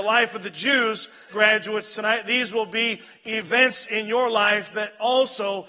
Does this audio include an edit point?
yes; 1 cut; at 1.3 s

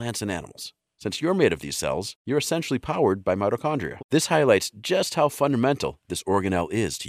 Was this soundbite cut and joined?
yes; 1 cut; at 4.0 s

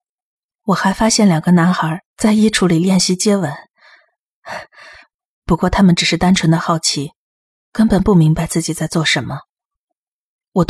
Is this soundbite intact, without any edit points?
no; 1 cut; at 2.1 s

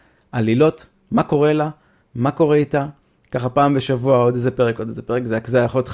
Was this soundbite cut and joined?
yes; 1 cut; at 4.8 s

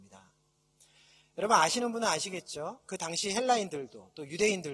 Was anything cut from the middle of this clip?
no; 0 cuts

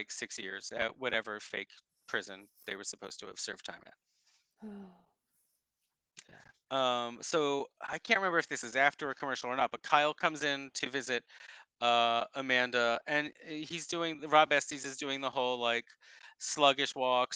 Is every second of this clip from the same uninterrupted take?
yes; 0 cuts

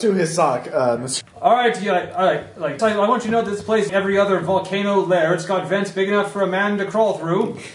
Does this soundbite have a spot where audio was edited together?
yes; 3 cuts; at 1.2 s, 2.8 s, 3.9 s

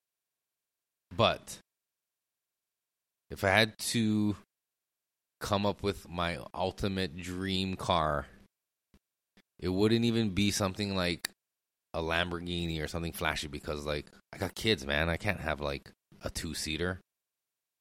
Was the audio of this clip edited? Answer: yes; 1 cut; at 6.0 s

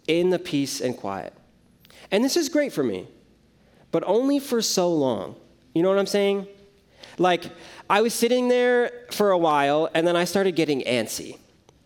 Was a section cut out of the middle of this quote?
no; 0 cuts

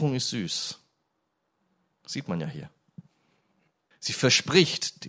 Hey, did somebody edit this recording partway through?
yes; 1 cut; at 3.9 s

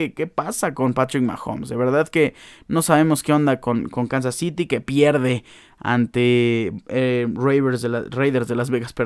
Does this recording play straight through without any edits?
yes; 0 cuts

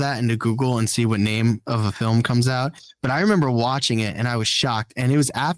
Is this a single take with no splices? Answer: yes; 0 cuts

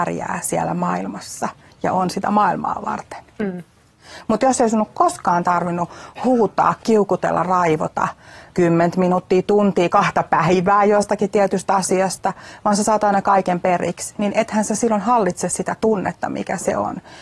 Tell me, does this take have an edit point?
no; 0 cuts

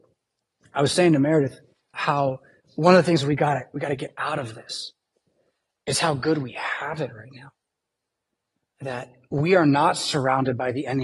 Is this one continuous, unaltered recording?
no; 1 cut; at 1.9 s

